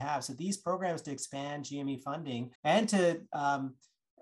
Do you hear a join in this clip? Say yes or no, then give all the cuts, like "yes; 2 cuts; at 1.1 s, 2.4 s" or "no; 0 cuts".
yes; 1 cut; at 2.6 s